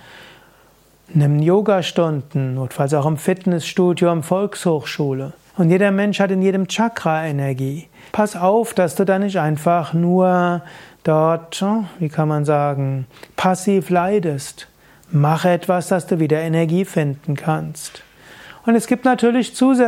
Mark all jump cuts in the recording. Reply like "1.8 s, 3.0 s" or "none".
5.5 s, 8.1 s